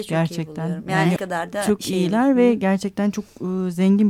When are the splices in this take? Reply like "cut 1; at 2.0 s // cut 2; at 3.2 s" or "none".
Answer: cut 1; at 1.2 s